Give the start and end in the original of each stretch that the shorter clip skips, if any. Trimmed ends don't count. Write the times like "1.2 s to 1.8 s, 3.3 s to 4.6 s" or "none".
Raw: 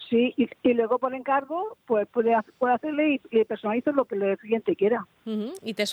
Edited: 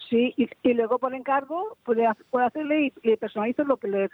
1.8 s to 2.1 s